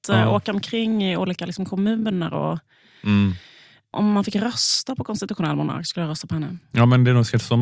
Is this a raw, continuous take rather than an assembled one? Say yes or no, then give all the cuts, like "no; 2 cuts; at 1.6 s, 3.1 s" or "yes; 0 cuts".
yes; 0 cuts